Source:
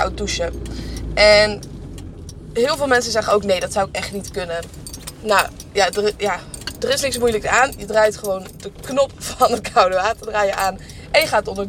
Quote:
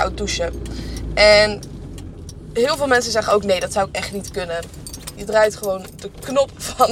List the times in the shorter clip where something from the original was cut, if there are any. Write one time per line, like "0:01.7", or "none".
0:05.2